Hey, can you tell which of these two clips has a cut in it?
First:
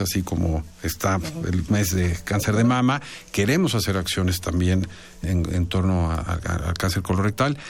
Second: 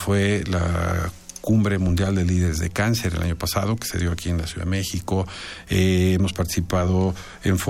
first; 1 cut; at 5.2 s

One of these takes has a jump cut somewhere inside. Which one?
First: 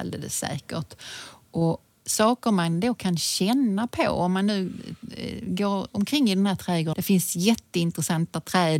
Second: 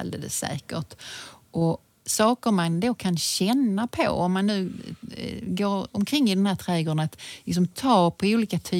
first; 1 cut; at 6.9 s

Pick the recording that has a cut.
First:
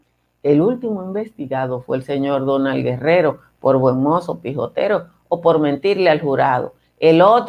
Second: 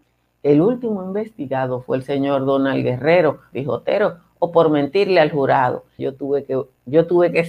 second; 2 cuts; at 3.5 s, 6.0 s

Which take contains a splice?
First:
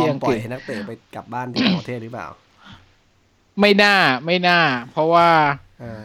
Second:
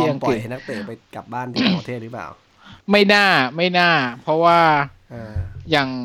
second; 1 cut; at 2.8 s

